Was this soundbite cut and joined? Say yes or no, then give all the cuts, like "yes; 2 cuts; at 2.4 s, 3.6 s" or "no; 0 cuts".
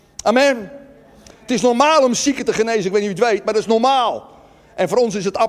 no; 0 cuts